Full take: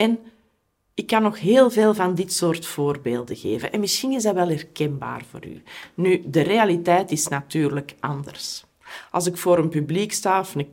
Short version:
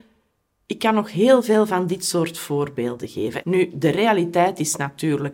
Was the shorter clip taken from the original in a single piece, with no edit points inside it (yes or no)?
no